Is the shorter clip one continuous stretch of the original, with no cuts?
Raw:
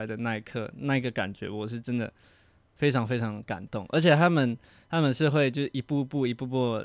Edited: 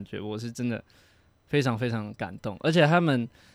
yes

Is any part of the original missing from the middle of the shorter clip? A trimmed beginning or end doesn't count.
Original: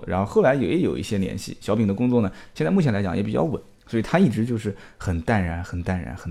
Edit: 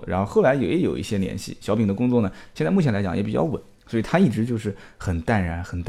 no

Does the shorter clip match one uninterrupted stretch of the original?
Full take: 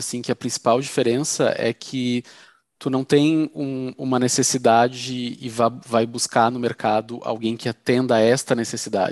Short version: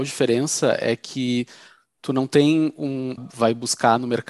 no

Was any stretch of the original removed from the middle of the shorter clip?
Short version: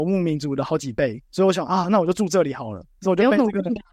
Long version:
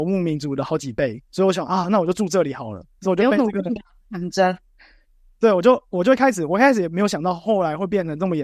no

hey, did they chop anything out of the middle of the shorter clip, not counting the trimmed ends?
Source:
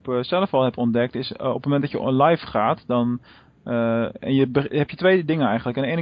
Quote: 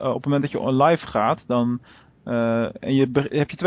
no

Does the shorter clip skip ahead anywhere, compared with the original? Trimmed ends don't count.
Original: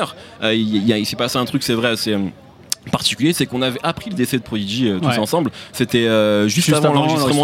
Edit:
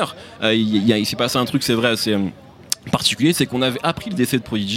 no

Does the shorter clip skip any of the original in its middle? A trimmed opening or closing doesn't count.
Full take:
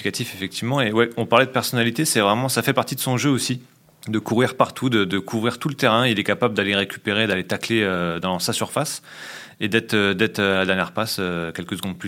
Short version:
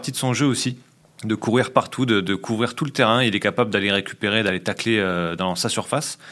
no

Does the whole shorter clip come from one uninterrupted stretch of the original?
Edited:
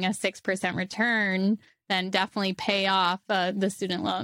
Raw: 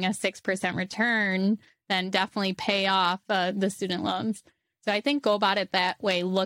yes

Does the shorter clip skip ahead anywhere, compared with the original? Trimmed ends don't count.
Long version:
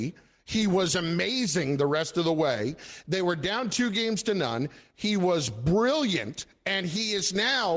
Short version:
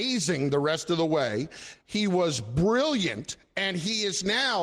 yes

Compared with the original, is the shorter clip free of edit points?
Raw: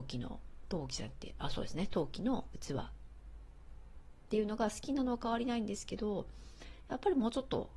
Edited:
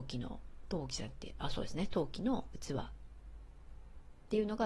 yes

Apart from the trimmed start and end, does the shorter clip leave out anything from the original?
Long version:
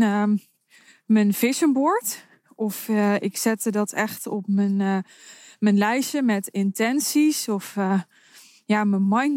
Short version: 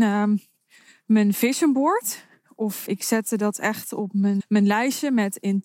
yes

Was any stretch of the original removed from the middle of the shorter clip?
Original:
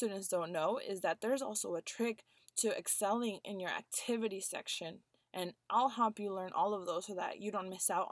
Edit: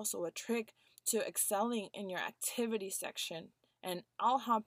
no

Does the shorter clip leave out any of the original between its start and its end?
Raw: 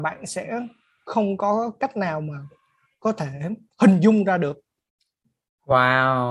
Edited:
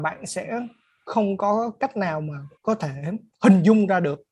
yes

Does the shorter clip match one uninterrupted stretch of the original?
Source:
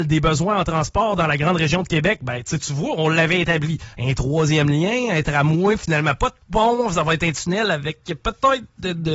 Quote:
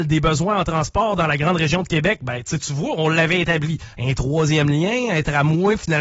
yes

